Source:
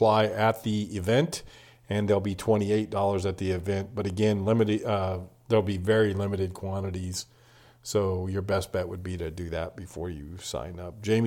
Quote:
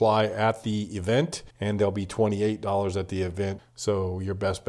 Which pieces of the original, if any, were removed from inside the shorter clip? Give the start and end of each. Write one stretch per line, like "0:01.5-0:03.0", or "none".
0:01.5-0:01.8
0:03.9-0:07.7